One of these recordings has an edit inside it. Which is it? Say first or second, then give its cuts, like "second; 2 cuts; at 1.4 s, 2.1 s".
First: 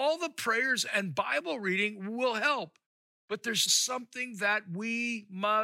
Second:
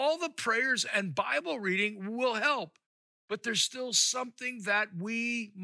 first; 1 cut; at 3.7 s